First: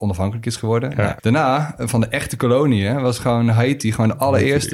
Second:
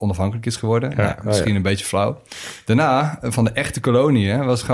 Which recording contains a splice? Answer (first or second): first